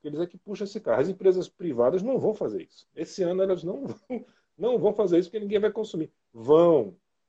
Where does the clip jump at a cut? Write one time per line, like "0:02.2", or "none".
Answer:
none